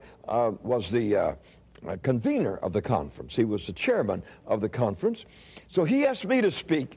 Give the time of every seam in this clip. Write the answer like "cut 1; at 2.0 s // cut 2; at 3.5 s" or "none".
none